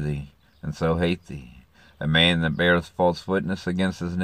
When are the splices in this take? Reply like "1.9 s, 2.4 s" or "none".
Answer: none